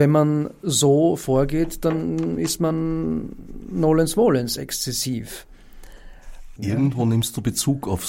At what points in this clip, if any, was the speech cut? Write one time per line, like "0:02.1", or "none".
0:06.6